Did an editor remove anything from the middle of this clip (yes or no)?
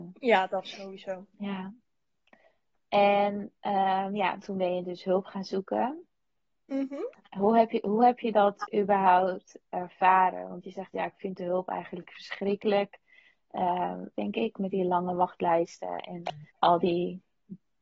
yes